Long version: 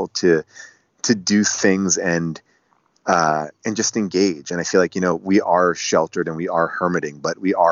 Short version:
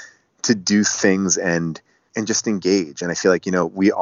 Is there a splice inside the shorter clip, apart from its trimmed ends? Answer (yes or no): yes